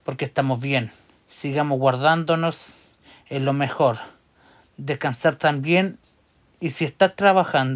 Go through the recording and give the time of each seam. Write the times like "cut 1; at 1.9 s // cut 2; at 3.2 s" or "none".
cut 1; at 1.2 s